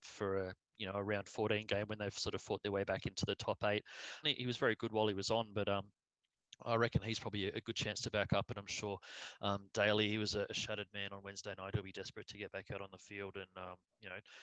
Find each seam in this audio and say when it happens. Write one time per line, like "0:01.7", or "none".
0:04.2